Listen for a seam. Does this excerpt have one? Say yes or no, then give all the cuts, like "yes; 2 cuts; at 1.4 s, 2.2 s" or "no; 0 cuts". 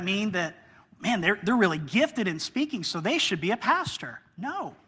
no; 0 cuts